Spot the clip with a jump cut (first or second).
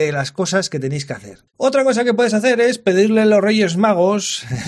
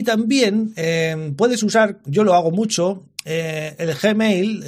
first